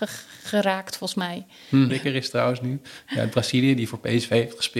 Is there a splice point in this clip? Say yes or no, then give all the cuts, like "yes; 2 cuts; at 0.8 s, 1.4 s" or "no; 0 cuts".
yes; 1 cut; at 1.9 s